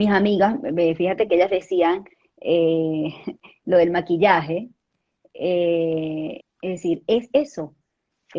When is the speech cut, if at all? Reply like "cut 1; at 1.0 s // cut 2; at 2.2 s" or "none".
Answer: cut 1; at 6.4 s